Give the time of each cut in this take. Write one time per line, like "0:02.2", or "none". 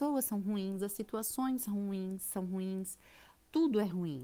none

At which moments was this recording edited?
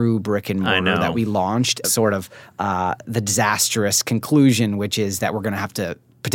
0:01.8
0:03.0

